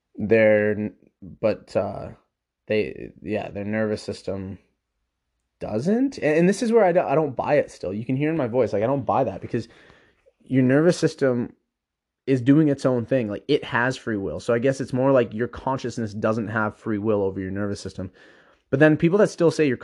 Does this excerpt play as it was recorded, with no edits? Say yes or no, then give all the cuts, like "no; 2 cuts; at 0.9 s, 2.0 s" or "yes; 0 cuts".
yes; 0 cuts